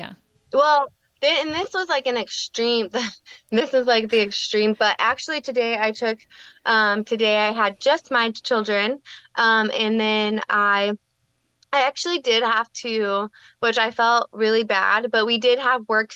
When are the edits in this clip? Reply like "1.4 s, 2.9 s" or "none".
none